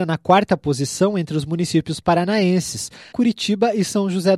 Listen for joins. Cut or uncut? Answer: cut